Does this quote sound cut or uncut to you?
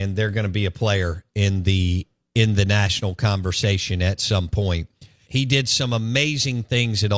cut